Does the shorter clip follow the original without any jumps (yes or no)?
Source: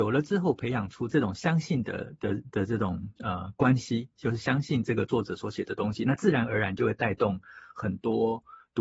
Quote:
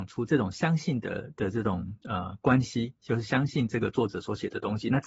no